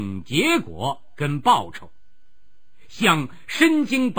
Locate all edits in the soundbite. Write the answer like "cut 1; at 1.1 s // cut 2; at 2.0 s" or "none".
none